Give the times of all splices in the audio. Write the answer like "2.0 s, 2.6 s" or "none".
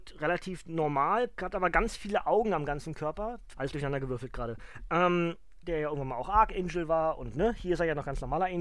3.5 s, 5.6 s